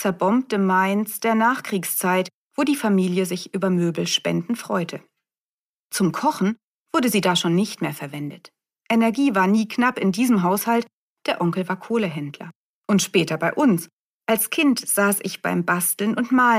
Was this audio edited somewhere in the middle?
yes; 1 cut; at 12.8 s

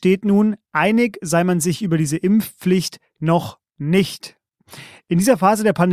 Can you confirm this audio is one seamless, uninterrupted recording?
yes; 0 cuts

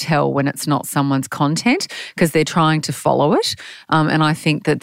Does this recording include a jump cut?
no; 0 cuts

